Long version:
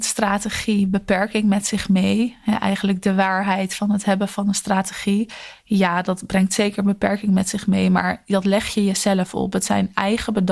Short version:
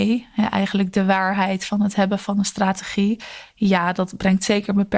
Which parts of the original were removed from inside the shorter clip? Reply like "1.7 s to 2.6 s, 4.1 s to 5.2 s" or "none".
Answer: none